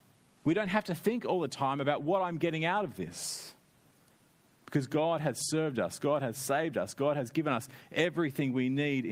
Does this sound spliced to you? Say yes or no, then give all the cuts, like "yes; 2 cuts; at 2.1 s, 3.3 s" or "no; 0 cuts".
no; 0 cuts